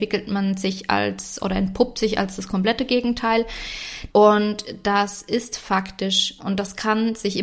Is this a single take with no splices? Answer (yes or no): no